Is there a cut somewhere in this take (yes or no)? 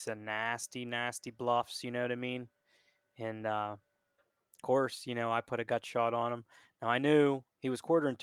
no